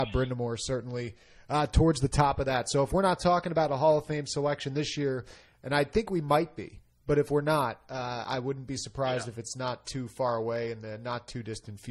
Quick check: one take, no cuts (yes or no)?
yes